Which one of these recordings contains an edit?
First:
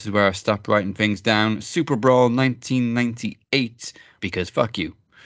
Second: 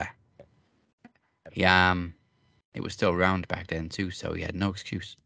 first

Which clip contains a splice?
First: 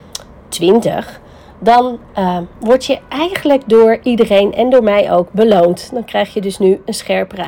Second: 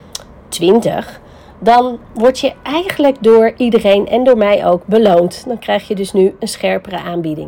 second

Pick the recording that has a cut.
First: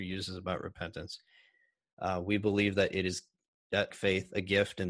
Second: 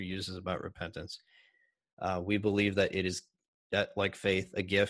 first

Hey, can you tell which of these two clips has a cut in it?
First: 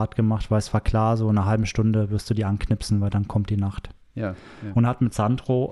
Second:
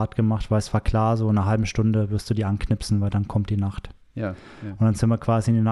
first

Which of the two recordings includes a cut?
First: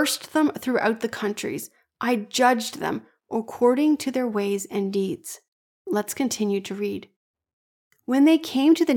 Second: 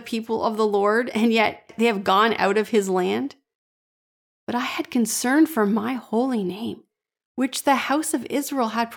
first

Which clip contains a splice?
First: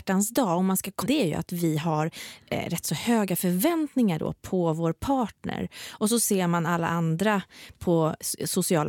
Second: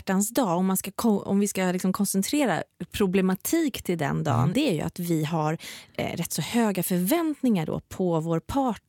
first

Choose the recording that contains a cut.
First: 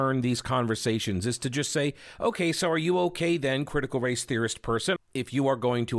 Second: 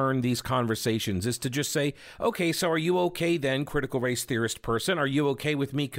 first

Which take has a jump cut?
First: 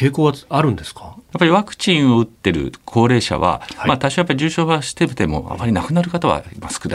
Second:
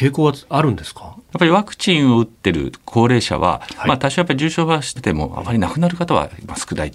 second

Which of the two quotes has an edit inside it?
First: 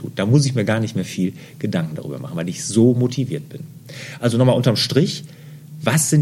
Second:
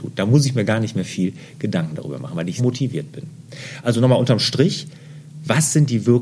second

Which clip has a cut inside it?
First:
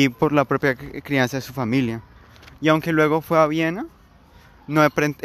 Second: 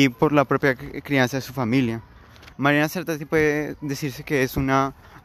second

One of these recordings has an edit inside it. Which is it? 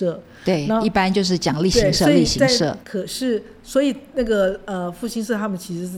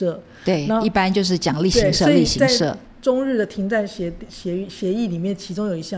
first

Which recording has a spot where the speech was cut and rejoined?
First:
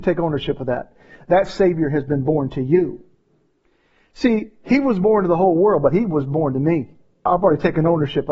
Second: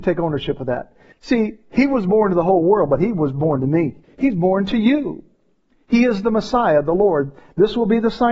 second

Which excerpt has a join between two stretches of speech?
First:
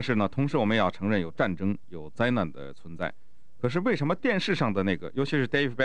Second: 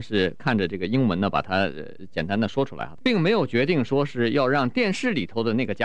second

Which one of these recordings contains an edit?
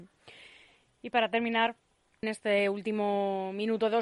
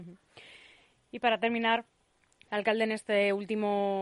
first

